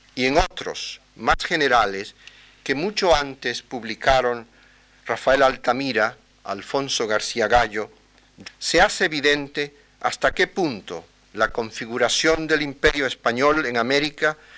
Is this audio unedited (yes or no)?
no